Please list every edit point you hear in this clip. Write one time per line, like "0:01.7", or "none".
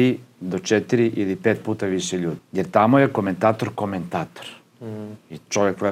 0:02.4

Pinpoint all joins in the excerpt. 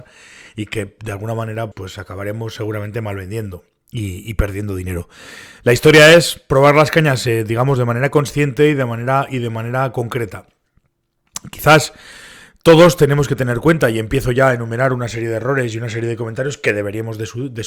0:01.7

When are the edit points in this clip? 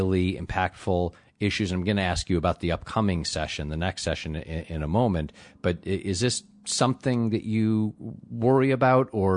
none

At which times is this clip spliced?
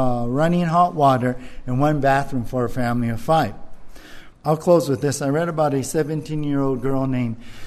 0:04.3

